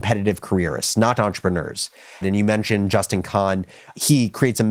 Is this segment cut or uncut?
cut